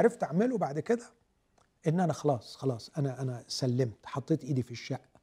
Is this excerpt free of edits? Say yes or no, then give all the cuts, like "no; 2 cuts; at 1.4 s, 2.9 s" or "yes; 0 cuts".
yes; 0 cuts